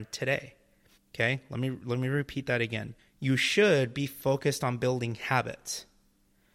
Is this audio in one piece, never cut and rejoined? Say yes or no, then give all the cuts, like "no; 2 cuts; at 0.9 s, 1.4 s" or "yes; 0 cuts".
no; 2 cuts; at 1.0 s, 3.0 s